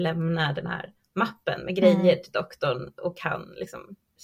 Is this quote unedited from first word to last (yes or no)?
yes